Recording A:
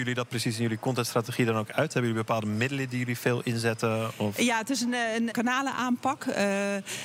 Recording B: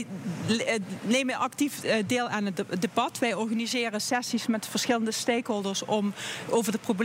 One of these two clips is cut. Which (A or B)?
A